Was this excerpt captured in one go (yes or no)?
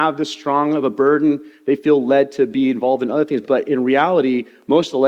no